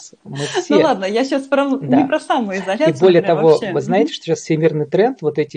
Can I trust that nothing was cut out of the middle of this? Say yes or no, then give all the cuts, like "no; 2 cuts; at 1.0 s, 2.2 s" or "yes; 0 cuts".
yes; 0 cuts